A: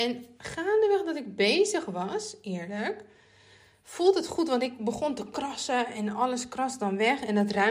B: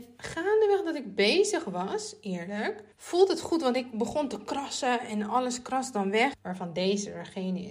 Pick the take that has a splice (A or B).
B